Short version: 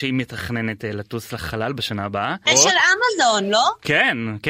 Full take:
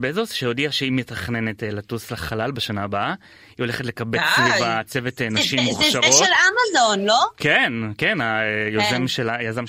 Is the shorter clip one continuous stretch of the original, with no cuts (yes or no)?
no